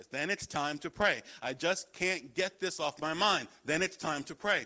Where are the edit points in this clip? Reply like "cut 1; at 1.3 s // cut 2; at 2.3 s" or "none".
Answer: none

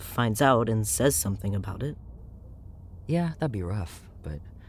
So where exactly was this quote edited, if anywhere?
none

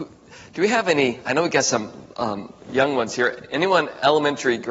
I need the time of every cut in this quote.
none

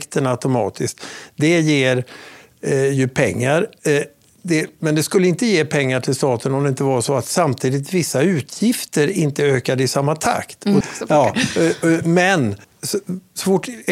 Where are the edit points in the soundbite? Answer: cut 1; at 10.8 s // cut 2; at 12.6 s

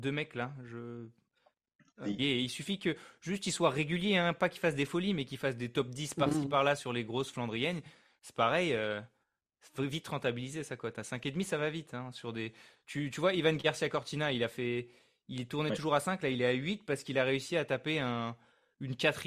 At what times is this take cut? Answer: cut 1; at 2.2 s

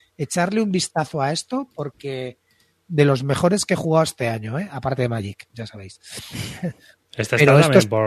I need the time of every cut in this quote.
cut 1; at 2.9 s

